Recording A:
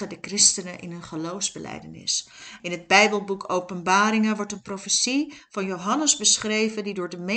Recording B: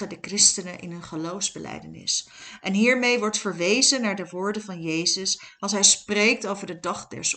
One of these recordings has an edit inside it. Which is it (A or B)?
A